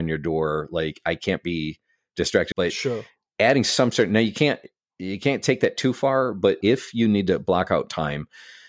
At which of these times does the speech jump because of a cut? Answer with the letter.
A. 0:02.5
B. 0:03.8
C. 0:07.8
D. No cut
A